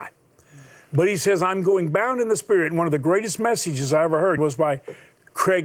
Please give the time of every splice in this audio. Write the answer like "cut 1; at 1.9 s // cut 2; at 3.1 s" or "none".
cut 1; at 4.4 s

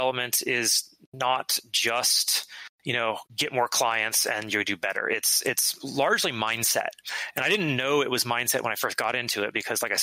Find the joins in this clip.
cut 1; at 3.3 s

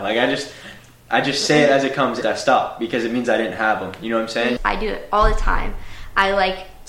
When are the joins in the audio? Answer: cut 1; at 2.2 s // cut 2; at 4.6 s

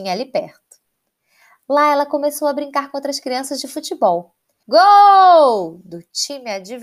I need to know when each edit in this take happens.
cut 1; at 4.6 s

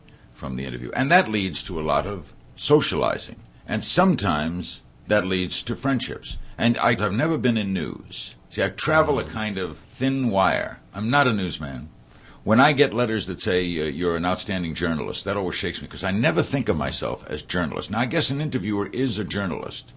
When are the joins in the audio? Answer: cut 1; at 7.0 s // cut 2; at 9.8 s

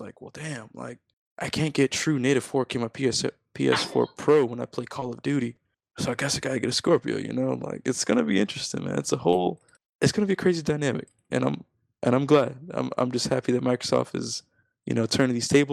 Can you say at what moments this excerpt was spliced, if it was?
none

